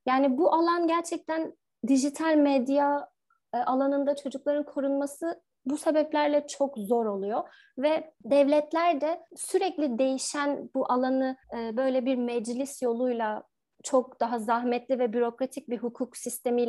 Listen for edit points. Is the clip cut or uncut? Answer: cut